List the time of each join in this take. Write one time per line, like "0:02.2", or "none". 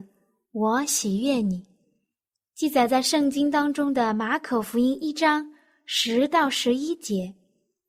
none